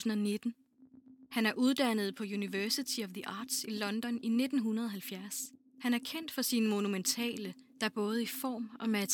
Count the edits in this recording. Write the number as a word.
three